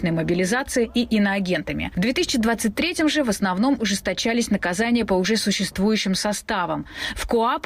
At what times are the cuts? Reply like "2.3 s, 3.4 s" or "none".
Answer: none